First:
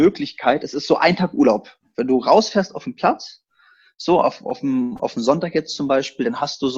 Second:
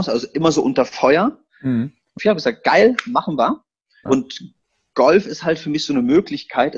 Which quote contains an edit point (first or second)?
second